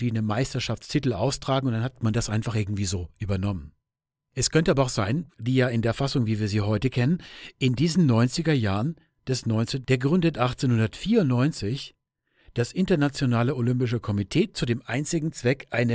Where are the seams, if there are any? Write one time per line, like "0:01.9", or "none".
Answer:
0:05.3
0:09.8

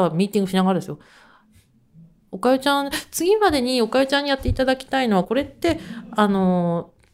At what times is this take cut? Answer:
0:05.2

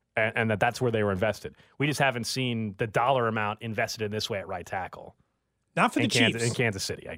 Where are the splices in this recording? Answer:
none

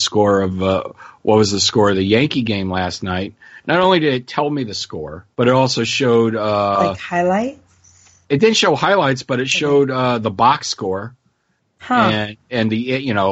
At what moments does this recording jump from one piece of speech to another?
0:05.3

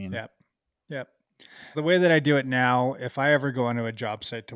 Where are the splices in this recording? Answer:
0:01.7

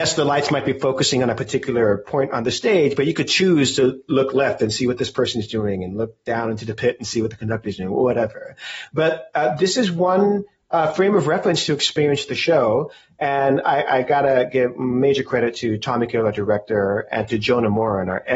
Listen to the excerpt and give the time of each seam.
none

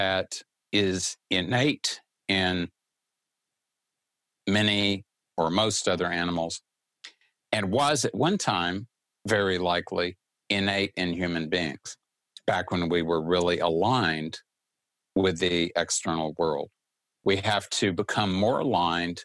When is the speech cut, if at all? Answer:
0:17.1

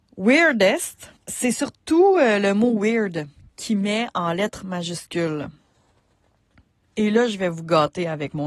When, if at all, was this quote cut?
0:01.2

